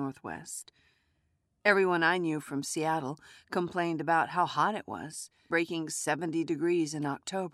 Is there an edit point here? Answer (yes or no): yes